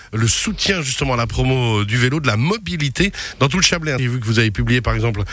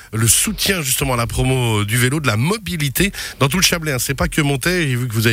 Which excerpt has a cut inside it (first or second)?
first